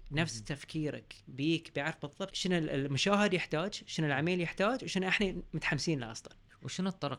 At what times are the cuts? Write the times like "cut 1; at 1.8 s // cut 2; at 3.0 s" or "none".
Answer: cut 1; at 2.3 s